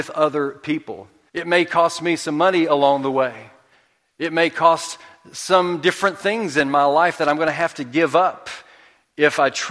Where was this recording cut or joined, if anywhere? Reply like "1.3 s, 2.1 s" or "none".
1.3 s